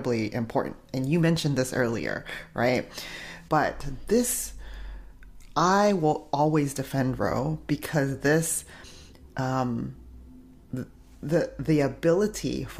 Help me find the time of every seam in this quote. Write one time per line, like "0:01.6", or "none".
0:03.5